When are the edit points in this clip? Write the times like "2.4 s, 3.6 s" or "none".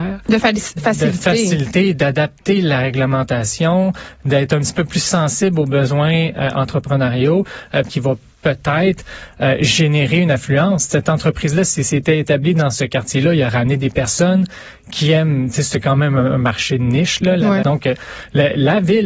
7.9 s, 17.6 s